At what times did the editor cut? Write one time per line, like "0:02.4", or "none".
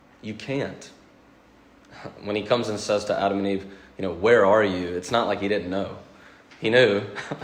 none